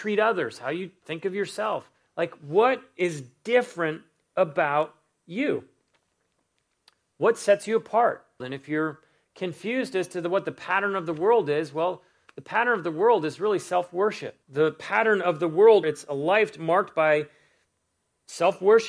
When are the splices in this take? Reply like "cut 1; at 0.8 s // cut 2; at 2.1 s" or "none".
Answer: cut 1; at 8.4 s // cut 2; at 14.4 s // cut 3; at 15.8 s